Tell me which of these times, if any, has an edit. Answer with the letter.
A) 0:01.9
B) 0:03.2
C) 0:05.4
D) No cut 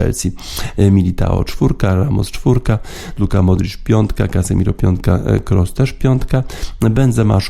B